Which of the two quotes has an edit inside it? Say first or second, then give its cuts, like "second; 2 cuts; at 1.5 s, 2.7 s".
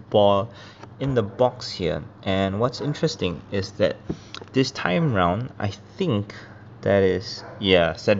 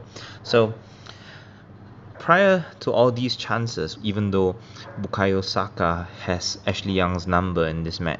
second; 2 cuts; at 2.1 s, 4.0 s